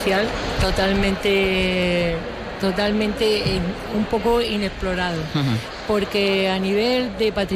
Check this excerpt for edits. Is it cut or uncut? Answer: uncut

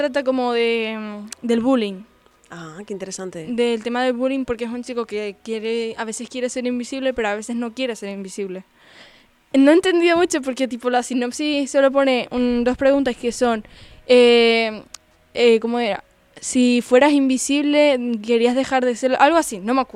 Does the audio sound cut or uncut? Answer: uncut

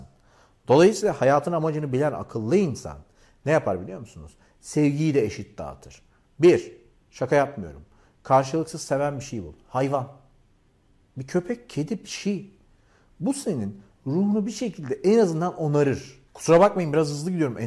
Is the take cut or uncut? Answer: uncut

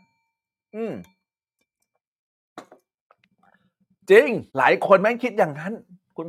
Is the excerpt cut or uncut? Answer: cut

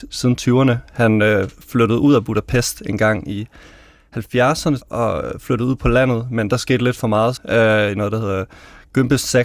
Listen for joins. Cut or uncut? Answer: cut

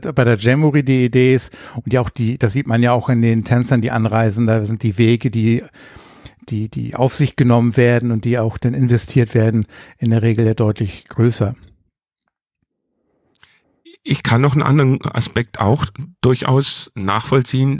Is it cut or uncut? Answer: uncut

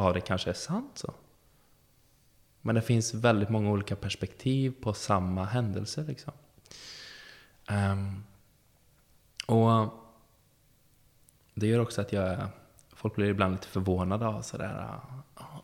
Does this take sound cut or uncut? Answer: uncut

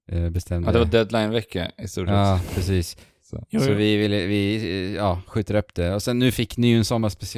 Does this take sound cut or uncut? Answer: uncut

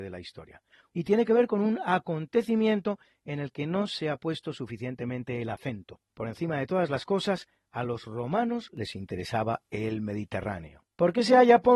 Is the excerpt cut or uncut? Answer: cut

